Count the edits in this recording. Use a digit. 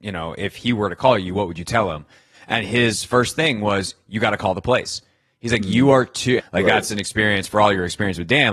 1